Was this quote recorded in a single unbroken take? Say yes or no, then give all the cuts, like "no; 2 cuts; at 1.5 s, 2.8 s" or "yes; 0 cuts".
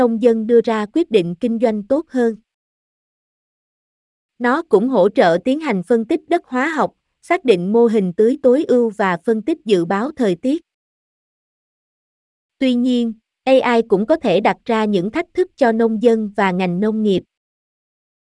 yes; 0 cuts